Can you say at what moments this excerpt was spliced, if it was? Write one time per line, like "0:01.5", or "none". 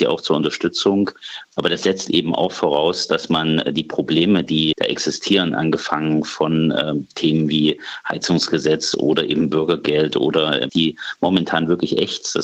0:01.4
0:04.7
0:10.7